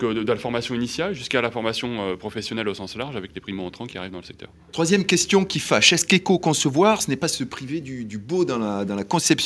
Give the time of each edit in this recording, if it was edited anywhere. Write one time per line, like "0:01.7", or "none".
none